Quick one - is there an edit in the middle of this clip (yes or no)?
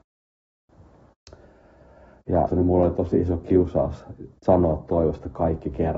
yes